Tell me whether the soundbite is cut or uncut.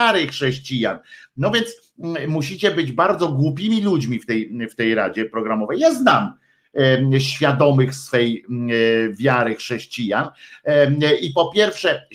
uncut